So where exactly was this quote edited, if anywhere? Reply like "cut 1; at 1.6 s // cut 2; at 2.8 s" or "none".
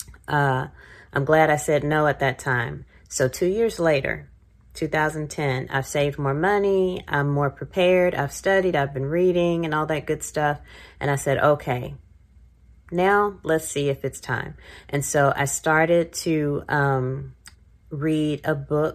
none